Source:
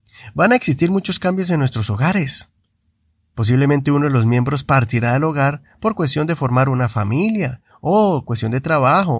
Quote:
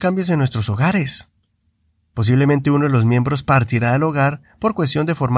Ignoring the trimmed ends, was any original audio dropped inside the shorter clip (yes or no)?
no